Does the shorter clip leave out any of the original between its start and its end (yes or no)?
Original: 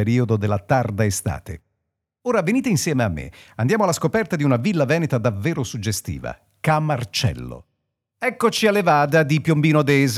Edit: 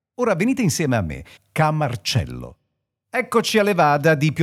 yes